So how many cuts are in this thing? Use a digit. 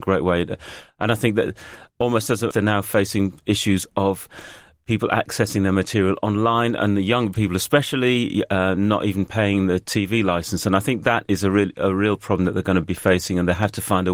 1